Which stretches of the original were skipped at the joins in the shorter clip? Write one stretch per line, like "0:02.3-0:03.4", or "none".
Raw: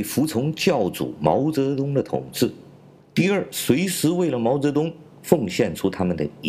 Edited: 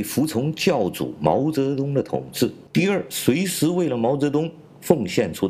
0:02.7-0:03.1